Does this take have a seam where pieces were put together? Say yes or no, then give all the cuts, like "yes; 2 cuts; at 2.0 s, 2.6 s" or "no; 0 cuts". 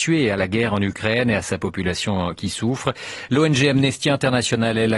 yes; 1 cut; at 3.3 s